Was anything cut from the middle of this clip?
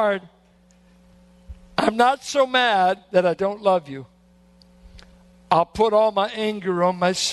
no; 0 cuts

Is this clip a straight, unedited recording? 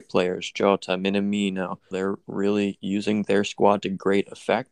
no; 1 cut; at 1.9 s

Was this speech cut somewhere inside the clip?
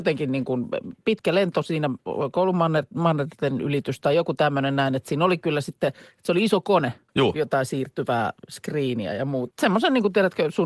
yes; 2 cuts; at 7.1 s, 9.5 s

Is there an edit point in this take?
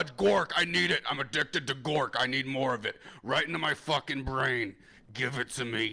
no; 0 cuts

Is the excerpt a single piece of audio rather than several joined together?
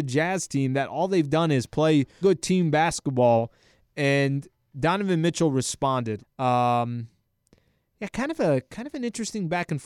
no; 3 cuts; at 2.2 s, 4.7 s, 6.2 s

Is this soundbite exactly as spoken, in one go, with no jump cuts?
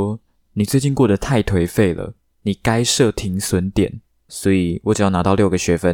no; 1 cut; at 4.3 s

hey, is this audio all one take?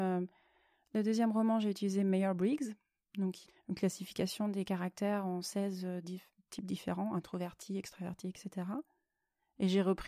yes; 0 cuts

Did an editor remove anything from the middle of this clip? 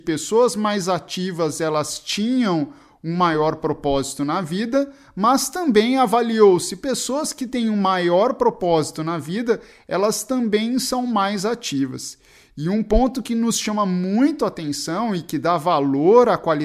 no; 0 cuts

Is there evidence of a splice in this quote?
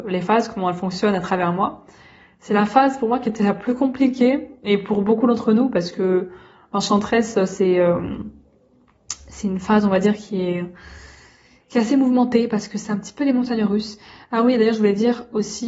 no; 0 cuts

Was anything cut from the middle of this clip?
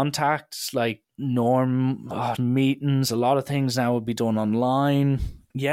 yes; 1 cut; at 2.4 s

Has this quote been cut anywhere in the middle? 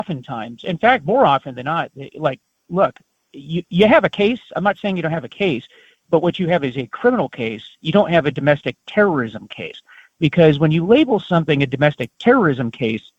no; 0 cuts

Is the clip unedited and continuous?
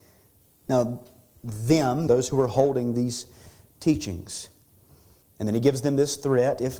no; 2 cuts; at 2.1 s, 5.2 s

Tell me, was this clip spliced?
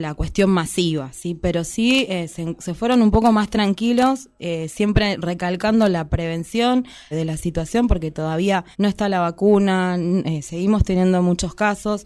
yes; 2 cuts; at 7.1 s, 8.7 s

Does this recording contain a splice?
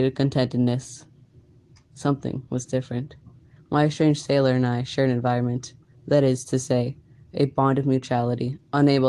yes; 1 cut; at 3.6 s

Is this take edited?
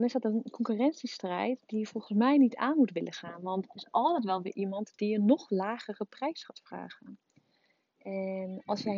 yes; 1 cut; at 3.7 s

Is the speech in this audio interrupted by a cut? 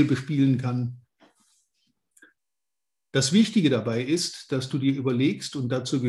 no; 0 cuts

